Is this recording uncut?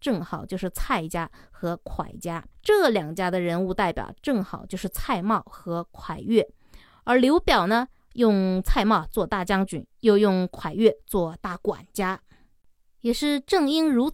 no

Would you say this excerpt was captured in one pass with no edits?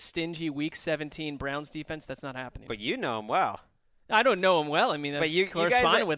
no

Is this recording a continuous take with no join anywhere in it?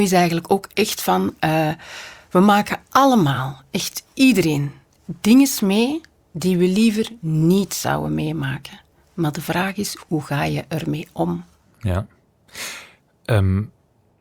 yes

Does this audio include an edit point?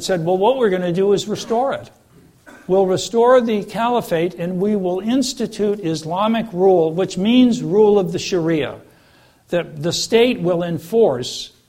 no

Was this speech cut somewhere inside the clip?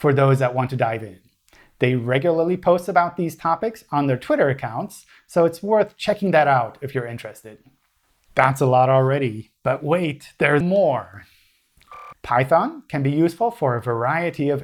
yes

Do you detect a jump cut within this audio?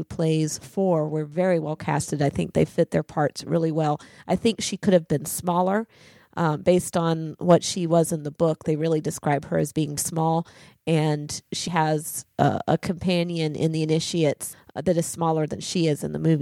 yes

